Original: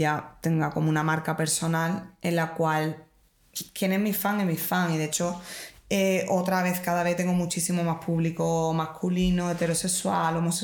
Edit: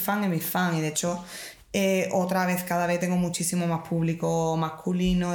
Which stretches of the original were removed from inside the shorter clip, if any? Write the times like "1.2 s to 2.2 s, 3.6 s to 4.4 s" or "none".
none